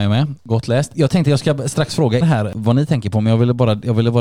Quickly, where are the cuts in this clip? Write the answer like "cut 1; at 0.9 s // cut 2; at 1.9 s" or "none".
cut 1; at 2.2 s